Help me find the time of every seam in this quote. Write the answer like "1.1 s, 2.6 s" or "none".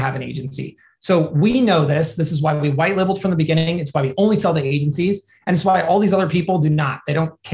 none